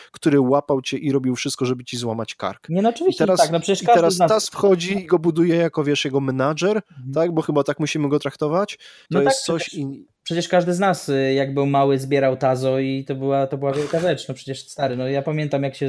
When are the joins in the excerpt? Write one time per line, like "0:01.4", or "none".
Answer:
0:09.1